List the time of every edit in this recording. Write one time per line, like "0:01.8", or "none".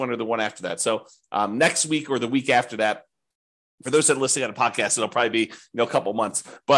none